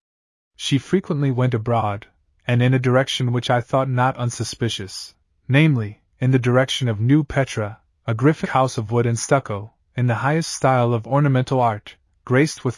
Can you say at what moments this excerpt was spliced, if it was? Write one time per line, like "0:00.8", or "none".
0:08.4